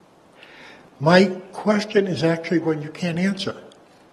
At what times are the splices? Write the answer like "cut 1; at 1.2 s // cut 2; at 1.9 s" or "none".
none